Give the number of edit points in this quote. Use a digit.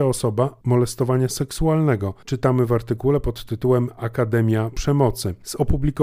0